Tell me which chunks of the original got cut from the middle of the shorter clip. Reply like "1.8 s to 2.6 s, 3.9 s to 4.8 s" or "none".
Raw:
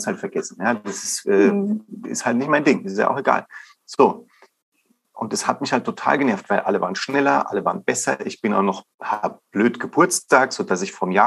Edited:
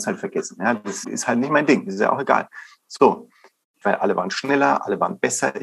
1.0 s to 2.0 s, 4.8 s to 6.5 s